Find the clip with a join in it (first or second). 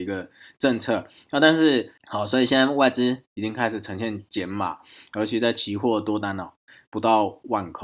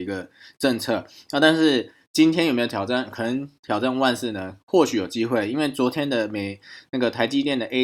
first